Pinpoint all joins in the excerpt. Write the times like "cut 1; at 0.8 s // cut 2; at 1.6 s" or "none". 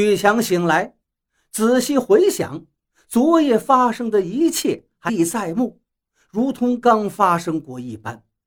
cut 1; at 5.1 s // cut 2; at 6.8 s